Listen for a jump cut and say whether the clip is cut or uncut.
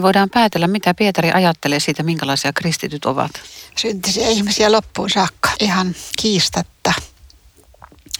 cut